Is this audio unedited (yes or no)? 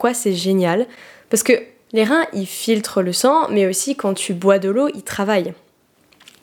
yes